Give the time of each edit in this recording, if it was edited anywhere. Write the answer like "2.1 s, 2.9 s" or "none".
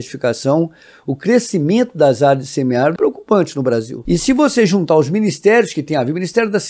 3.0 s, 4.1 s